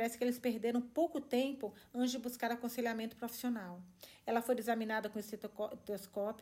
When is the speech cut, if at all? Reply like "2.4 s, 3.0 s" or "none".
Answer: none